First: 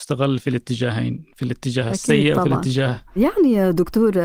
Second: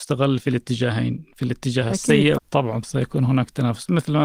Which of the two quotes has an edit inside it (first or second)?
second